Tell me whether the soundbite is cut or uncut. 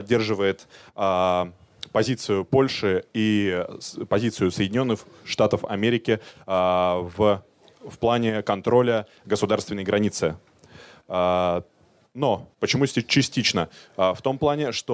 cut